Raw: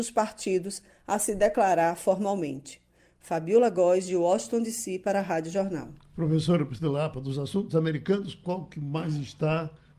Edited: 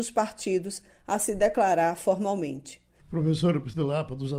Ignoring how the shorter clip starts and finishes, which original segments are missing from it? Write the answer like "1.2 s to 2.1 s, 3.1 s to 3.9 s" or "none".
3.0 s to 6.0 s

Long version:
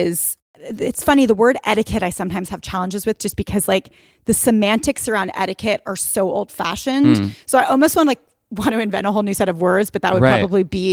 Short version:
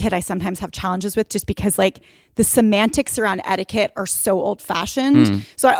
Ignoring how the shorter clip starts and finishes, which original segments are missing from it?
none

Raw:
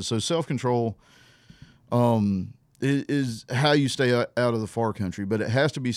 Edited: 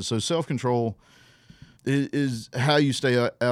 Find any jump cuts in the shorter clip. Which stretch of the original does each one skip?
1.8 s to 2.7 s

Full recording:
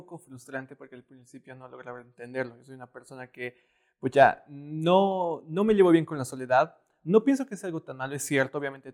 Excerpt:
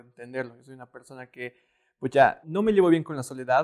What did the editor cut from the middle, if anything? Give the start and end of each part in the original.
4.4 s to 5.4 s

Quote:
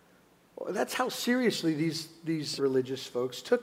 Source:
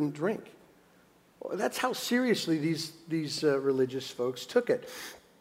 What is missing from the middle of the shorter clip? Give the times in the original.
3.4 s to 3.6 s

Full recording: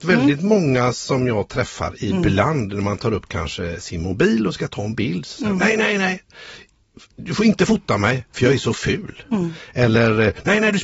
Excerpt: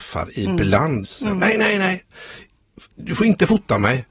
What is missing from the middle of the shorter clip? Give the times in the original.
2.7 s to 5.2 s

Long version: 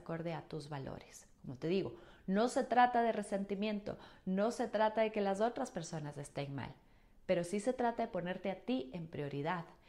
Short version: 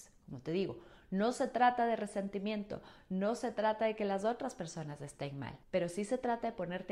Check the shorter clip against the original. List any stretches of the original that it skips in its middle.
6.8 s to 7.2 s

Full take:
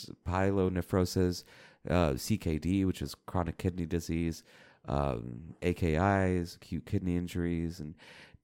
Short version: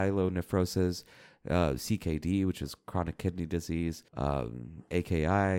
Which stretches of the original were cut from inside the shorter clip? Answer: 4.5 s to 4.8 s

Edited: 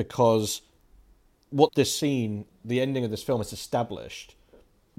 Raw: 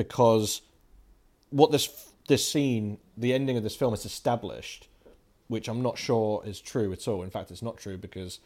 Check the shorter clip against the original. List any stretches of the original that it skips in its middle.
1.7 s to 2.2 s

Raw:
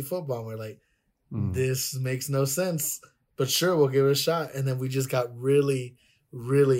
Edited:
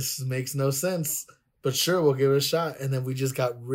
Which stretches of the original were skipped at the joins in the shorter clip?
none

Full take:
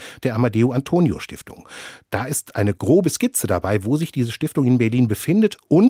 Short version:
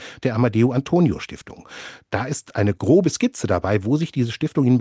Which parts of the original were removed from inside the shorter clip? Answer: none

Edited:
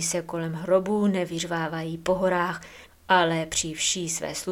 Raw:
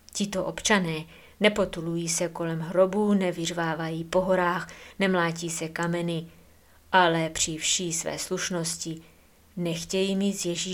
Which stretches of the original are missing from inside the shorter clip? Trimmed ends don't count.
5.0 s to 6.7 s

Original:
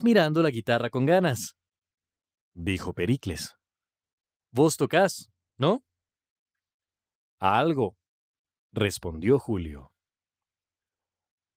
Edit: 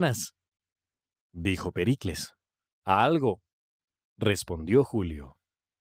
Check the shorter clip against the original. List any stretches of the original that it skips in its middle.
3.9 s to 7.3 s

